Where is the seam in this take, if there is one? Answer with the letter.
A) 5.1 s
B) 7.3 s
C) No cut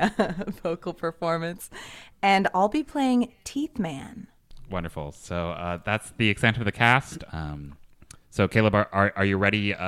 B